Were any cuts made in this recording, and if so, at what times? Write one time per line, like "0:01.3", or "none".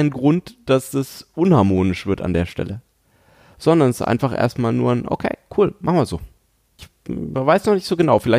0:06.8